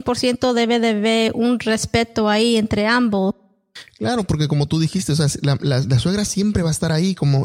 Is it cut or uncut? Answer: uncut